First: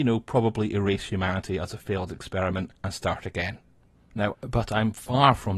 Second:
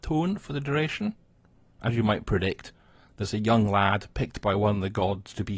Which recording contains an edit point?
first; 2 cuts; at 2.8 s, 4.3 s

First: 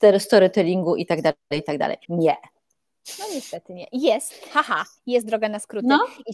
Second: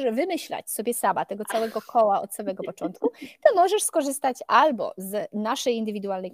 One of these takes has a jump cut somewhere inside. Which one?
first; 1 cut; at 2.0 s

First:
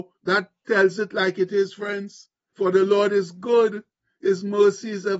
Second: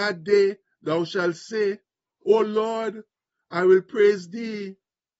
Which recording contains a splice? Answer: first; 1 cut; at 2.5 s

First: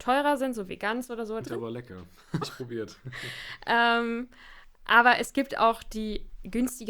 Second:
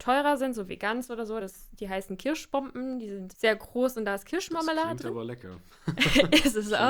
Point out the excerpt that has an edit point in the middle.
first; 2 cuts; at 1.4 s, 2.4 s

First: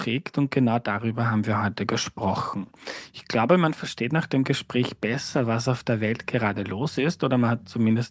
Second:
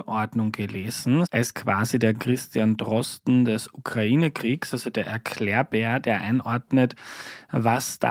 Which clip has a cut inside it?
second; 1 cut; at 1.2 s

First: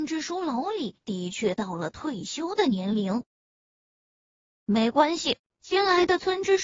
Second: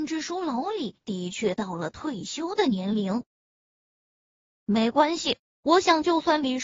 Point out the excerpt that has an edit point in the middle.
first; 1 cut; at 5.4 s

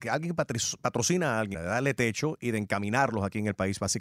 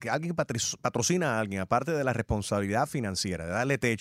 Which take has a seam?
first; 1 cut; at 1.5 s

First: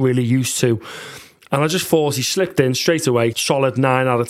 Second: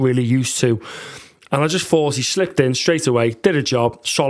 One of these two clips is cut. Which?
first; 1 cut; at 3.3 s

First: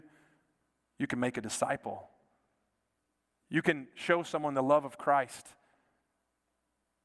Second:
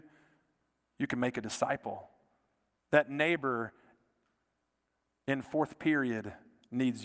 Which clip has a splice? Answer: second; 1 cut; at 2.8 s

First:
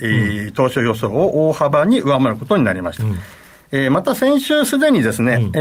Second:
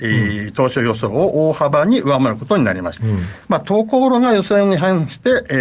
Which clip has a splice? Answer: second; 1 cut; at 3.0 s

